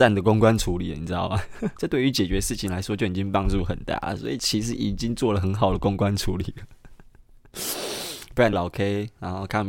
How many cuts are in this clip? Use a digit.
3